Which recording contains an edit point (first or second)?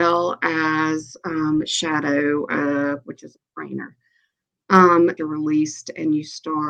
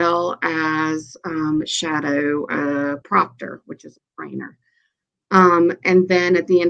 first